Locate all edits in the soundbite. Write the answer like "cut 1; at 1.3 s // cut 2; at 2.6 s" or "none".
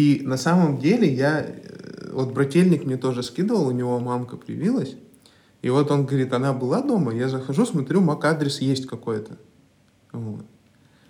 none